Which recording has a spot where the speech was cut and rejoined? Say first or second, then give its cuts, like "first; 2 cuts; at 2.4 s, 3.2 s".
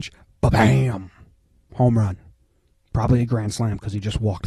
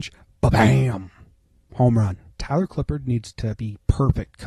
second; 1 cut; at 2.4 s